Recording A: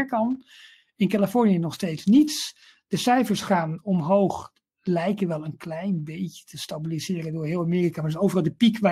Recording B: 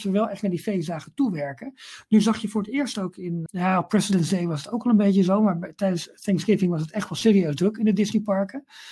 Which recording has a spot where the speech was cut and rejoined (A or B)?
B